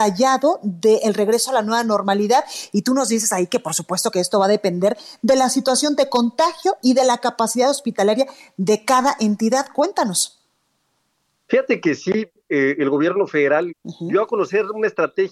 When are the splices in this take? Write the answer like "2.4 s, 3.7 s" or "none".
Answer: 13.7 s